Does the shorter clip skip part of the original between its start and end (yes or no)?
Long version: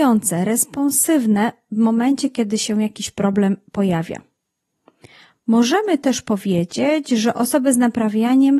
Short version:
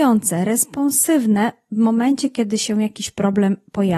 no